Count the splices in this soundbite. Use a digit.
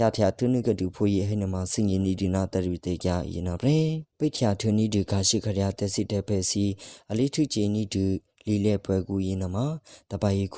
1